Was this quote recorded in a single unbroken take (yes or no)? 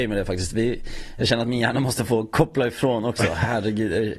yes